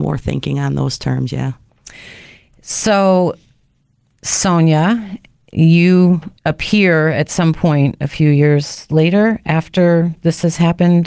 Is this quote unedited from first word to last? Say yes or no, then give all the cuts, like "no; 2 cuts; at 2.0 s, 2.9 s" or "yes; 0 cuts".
no; 1 cut; at 6.4 s